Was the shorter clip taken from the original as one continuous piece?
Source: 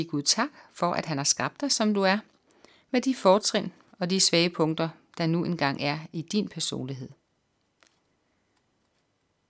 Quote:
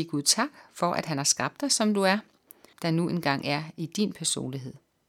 no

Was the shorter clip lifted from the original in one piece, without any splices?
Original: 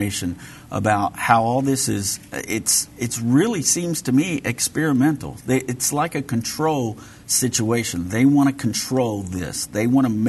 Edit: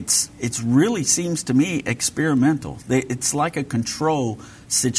yes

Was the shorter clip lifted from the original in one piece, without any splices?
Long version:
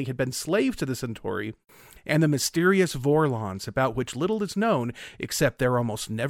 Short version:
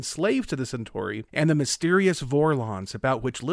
no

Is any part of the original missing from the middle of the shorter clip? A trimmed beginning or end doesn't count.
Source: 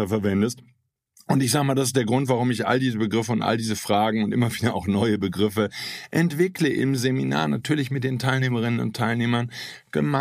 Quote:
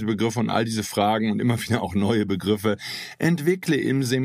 no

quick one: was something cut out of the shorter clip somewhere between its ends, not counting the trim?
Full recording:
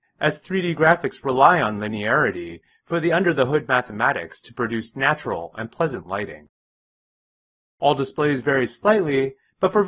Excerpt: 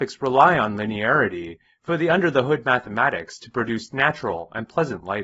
no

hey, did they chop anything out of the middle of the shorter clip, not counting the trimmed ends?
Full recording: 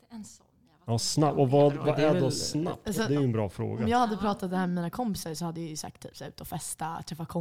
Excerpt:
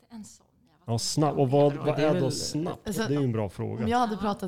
no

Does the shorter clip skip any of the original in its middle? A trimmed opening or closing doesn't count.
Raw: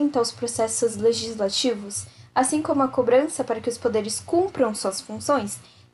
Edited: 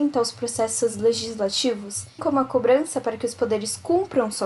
yes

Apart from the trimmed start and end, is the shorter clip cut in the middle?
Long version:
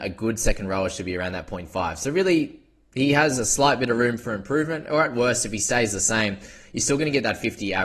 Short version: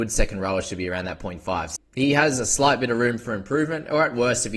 yes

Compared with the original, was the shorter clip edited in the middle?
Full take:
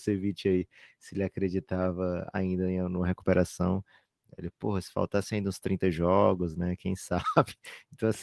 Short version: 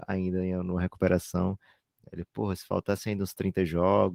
no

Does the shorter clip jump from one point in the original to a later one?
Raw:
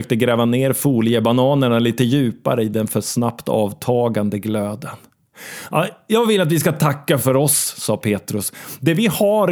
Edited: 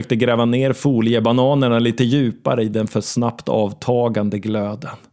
no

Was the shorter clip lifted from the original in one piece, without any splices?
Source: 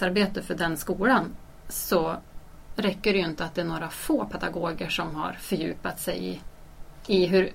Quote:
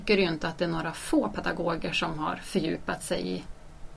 yes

